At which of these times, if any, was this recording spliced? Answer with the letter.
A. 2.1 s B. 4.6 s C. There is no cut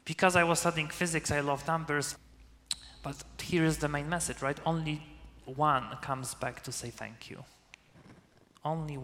A